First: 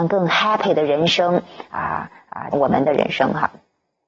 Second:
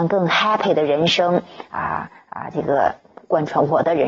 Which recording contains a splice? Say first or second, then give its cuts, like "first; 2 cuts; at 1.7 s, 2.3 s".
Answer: first; 1 cut; at 2.5 s